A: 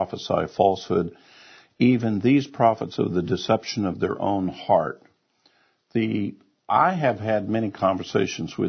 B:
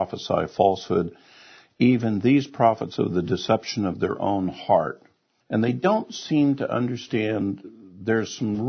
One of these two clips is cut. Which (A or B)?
B